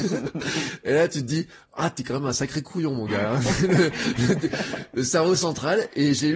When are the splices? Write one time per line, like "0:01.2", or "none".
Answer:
none